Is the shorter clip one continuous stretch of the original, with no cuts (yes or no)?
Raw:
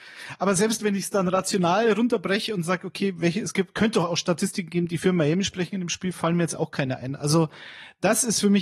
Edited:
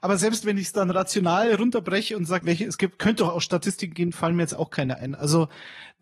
no